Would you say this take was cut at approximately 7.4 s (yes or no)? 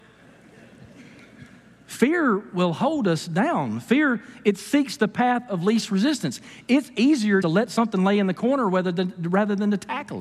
yes